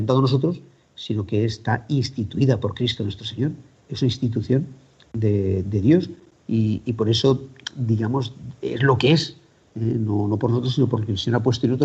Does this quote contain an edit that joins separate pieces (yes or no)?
no